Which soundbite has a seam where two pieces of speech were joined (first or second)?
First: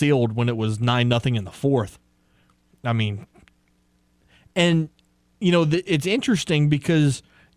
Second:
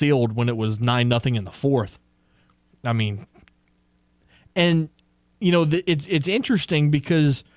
first